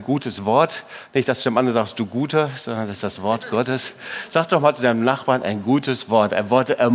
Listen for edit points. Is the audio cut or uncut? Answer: uncut